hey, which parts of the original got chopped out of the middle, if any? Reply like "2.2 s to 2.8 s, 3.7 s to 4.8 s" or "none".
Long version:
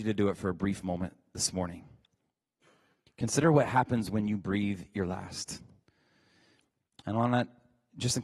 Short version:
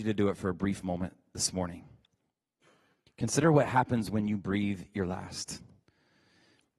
none